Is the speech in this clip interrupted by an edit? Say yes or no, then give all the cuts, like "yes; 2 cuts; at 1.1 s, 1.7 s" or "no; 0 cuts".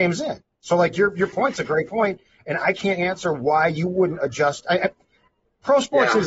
no; 0 cuts